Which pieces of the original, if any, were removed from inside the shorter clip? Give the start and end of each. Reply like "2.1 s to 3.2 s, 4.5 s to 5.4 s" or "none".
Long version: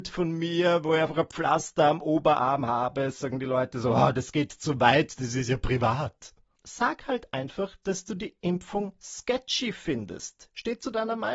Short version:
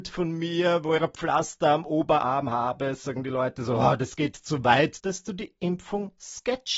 1.0 s to 1.1 s, 5.1 s to 7.8 s